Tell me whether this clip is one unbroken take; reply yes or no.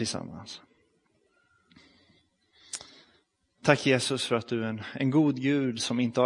yes